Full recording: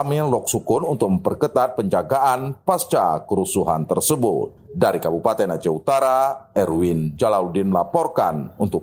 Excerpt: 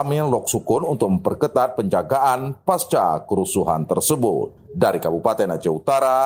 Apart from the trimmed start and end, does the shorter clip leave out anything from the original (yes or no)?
no